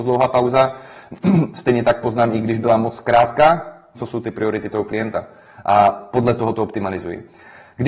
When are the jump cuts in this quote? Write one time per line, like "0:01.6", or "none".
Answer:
0:03.9

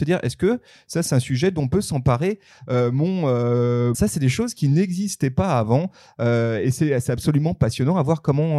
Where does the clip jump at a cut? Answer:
0:03.9

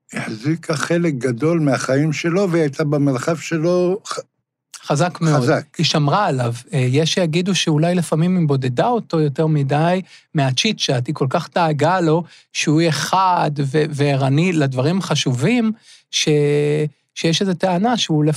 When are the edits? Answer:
none

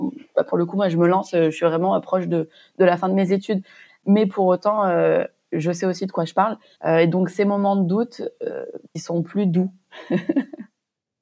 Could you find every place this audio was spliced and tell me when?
0:03.9
0:06.8
0:08.9

